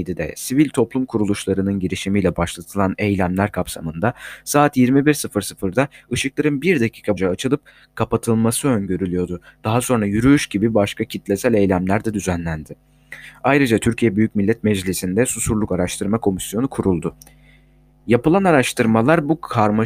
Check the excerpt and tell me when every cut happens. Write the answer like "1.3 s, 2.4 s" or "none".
7.2 s